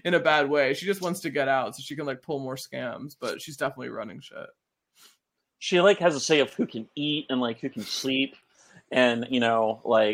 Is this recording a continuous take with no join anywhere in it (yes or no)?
yes